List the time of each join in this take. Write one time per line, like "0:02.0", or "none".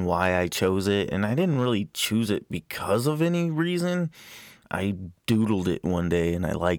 none